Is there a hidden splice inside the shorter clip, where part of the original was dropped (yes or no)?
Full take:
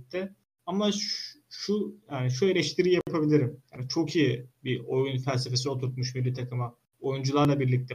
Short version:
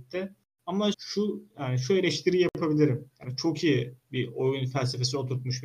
yes